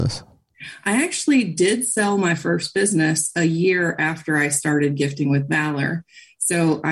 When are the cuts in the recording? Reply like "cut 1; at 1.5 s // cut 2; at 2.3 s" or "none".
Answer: none